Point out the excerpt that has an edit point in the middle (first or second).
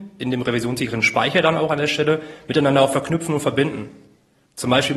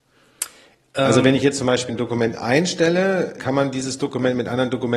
second